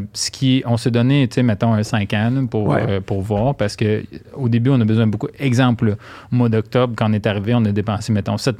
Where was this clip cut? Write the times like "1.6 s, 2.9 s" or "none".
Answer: none